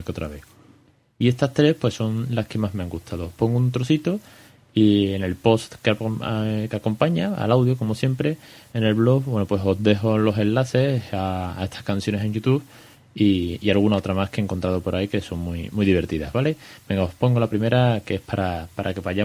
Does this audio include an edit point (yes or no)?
no